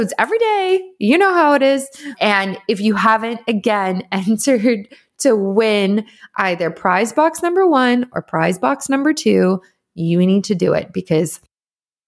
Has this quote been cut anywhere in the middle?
no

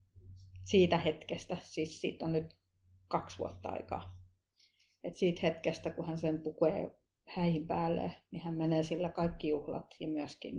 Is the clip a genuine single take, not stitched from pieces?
yes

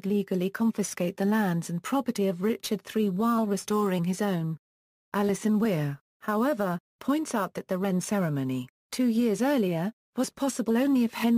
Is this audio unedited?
no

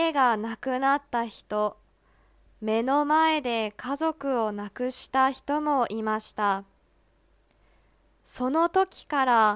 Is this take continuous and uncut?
yes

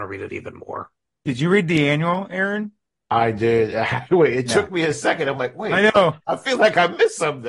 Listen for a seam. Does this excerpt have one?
no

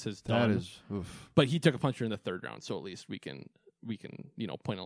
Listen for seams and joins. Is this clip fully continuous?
yes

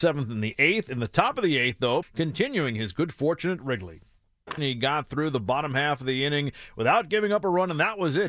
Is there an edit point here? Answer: yes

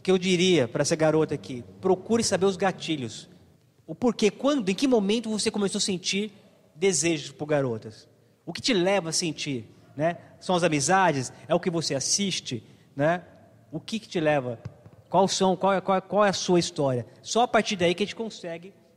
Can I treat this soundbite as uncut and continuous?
yes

